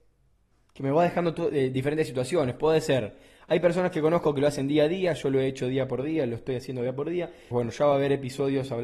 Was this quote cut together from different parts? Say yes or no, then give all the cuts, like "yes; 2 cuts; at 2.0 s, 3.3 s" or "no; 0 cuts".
yes; 1 cut; at 7.5 s